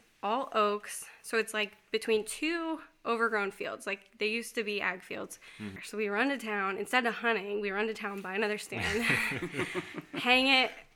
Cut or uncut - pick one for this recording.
cut